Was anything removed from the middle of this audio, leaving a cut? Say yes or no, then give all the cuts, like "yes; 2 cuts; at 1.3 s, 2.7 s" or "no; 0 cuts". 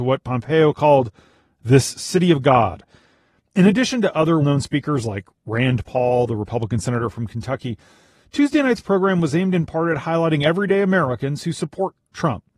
yes; 1 cut; at 4.4 s